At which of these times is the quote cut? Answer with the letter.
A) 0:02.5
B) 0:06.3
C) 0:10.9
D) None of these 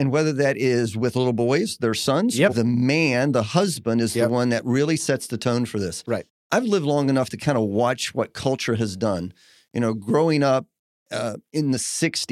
A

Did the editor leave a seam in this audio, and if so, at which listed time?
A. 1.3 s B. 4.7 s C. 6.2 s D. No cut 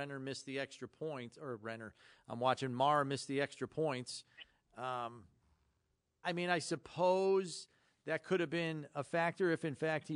C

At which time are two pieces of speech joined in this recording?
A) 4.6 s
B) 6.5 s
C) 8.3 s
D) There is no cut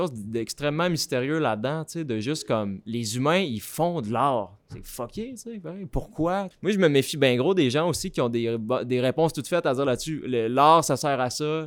B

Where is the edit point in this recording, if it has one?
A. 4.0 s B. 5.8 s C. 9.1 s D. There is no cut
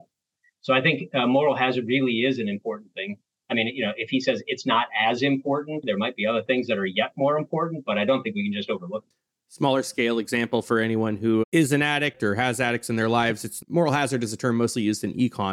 B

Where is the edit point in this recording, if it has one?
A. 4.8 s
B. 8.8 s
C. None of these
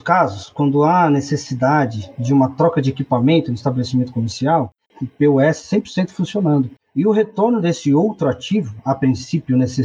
A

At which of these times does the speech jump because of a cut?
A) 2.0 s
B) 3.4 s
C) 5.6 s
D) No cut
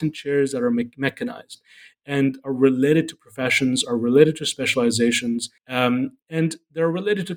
C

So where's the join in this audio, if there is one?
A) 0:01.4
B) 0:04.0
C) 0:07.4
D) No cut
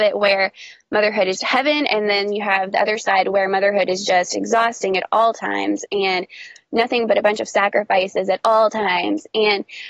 A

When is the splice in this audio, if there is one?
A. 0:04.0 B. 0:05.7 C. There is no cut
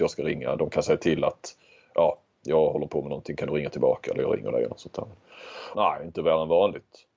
B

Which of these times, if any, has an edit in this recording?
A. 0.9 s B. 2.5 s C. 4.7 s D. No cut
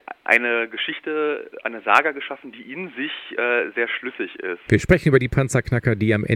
C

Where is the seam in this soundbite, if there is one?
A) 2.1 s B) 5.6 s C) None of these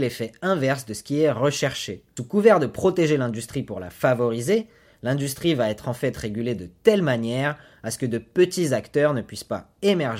C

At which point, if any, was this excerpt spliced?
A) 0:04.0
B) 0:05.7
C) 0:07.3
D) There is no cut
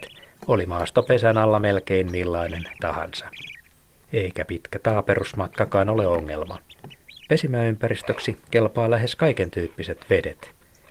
C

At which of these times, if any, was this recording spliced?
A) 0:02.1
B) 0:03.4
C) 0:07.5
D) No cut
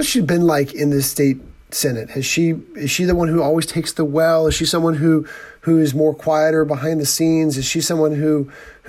D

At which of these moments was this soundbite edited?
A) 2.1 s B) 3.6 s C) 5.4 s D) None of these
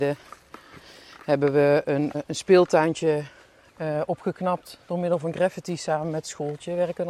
A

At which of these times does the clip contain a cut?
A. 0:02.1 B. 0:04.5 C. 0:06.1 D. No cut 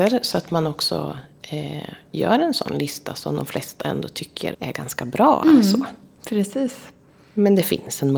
B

